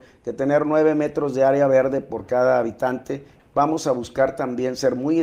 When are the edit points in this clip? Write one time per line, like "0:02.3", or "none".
0:03.4